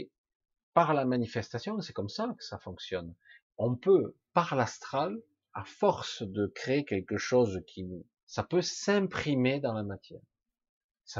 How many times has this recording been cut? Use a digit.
2